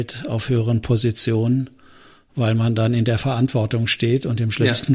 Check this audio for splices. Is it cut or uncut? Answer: uncut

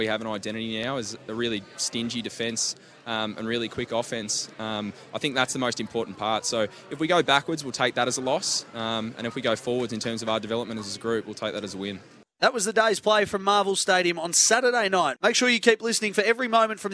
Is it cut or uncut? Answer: uncut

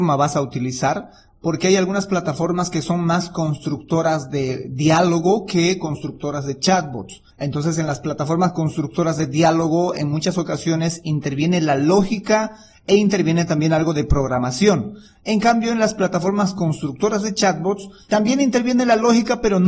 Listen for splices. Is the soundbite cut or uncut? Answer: cut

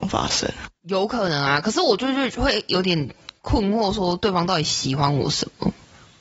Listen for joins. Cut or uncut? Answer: uncut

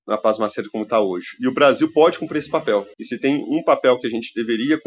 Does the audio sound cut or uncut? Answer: cut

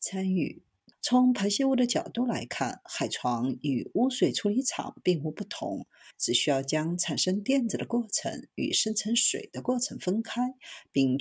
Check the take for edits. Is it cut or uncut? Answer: cut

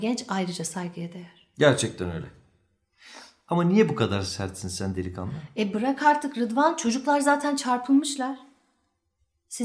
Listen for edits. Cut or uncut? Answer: uncut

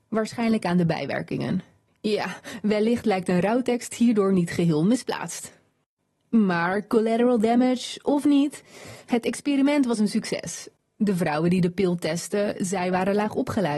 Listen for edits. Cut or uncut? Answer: cut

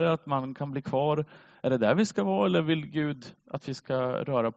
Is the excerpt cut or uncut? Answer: uncut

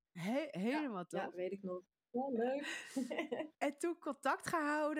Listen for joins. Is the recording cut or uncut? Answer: cut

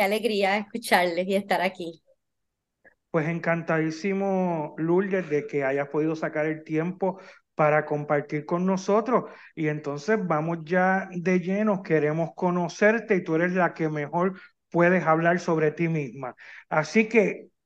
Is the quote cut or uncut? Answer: uncut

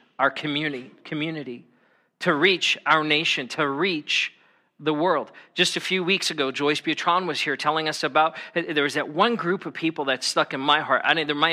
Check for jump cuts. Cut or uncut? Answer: uncut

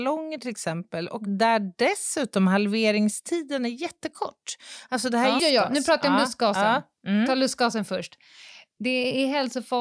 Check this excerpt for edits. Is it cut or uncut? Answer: cut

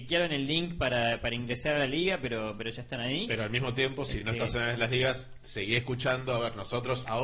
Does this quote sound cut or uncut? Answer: uncut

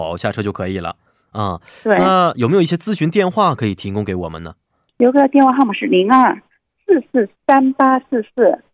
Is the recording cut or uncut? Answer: cut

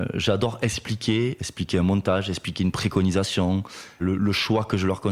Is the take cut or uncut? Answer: cut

